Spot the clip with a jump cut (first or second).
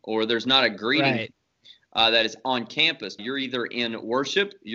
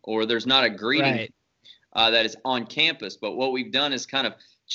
first